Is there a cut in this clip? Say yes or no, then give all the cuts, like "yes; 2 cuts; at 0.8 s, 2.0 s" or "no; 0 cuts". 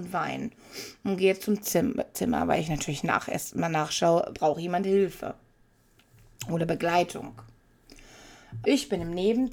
yes; 2 cuts; at 4.3 s, 8.6 s